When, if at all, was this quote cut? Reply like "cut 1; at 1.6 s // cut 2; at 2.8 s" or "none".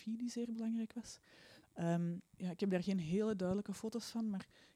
cut 1; at 2.3 s